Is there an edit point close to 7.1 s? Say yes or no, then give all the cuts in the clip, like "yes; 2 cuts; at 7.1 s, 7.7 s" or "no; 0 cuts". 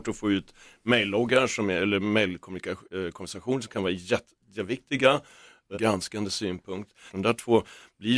yes; 2 cuts; at 5.7 s, 7.1 s